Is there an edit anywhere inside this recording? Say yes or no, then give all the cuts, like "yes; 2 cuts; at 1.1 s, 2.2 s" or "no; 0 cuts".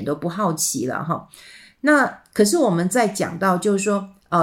no; 0 cuts